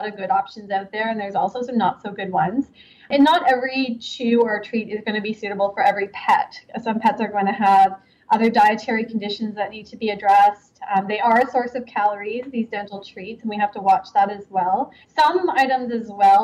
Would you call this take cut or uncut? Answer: cut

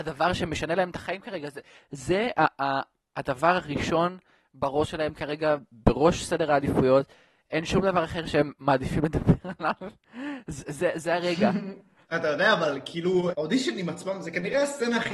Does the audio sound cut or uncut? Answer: cut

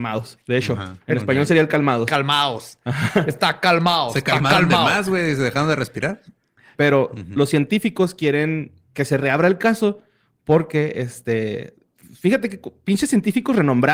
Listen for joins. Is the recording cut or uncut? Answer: cut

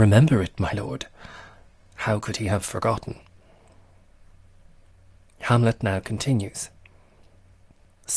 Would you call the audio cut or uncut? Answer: uncut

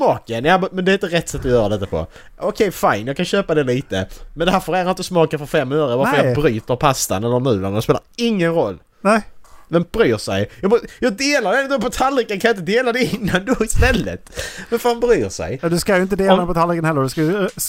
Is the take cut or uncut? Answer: uncut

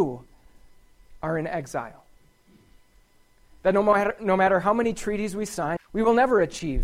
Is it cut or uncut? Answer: cut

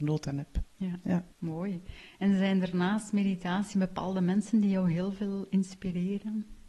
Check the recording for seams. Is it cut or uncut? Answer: cut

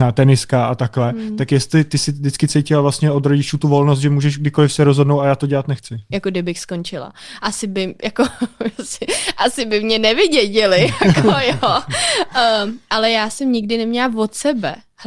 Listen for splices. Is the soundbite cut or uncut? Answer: cut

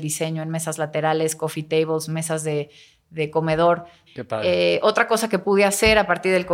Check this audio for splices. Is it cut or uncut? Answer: cut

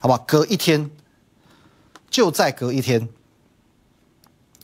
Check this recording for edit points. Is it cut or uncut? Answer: uncut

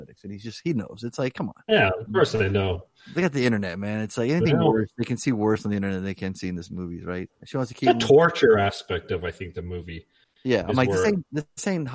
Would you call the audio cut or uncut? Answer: cut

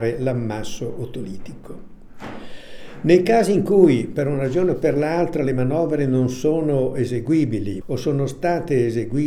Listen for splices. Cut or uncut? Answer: cut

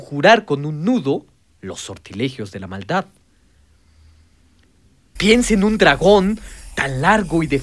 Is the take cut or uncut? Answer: cut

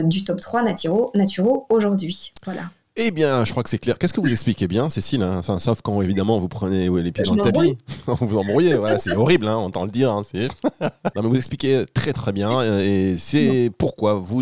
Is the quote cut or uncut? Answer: cut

